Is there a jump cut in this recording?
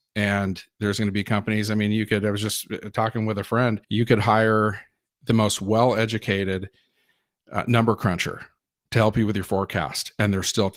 yes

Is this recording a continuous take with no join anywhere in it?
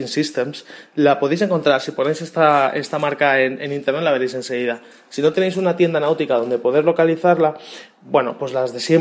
yes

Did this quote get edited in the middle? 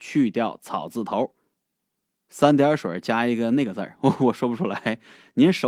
no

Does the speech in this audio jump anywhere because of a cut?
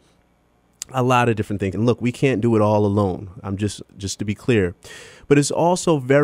yes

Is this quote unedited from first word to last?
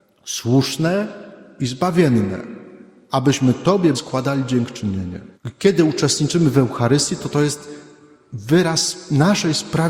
no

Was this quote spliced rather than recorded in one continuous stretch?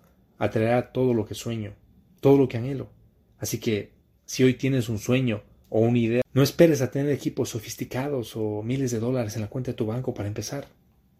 no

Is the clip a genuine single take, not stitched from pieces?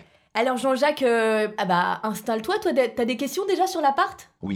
yes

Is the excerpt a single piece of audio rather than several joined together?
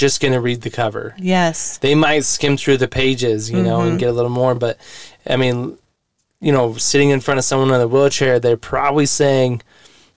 yes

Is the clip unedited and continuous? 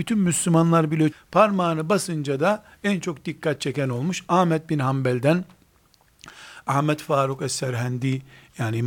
no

